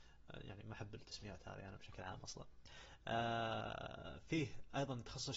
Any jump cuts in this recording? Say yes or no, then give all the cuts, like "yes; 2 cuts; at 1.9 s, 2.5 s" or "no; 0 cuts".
no; 0 cuts